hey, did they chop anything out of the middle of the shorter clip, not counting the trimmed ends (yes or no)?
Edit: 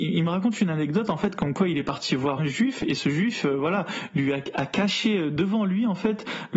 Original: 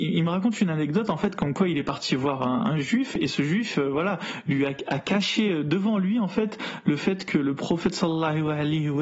yes